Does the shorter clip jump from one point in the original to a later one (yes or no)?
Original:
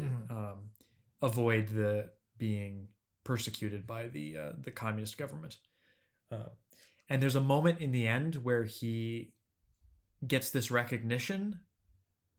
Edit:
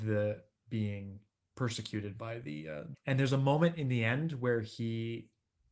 yes